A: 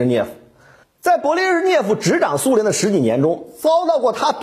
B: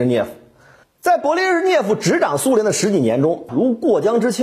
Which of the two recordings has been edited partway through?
B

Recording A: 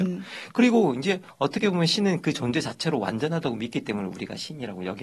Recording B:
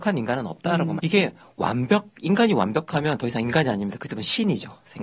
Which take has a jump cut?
B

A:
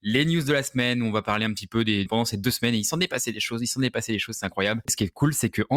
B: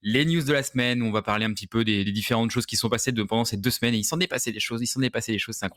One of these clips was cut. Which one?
A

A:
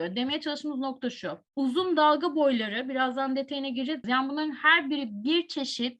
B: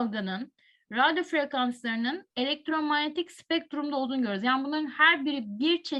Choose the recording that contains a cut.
A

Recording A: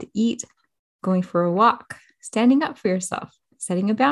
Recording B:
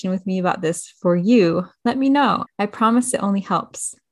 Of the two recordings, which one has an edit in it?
B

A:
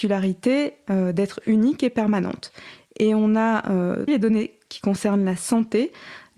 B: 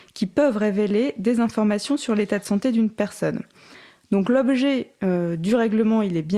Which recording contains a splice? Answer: A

